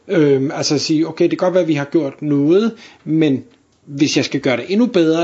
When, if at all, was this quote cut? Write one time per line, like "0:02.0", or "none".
none